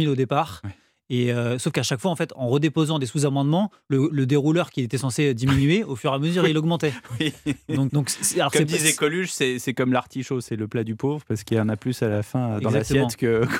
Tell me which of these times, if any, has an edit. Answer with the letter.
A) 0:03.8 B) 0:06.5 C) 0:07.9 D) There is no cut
C